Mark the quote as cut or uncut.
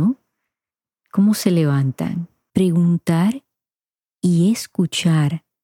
cut